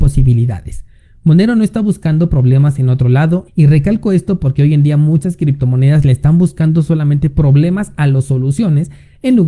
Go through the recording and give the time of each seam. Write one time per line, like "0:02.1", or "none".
0:03.5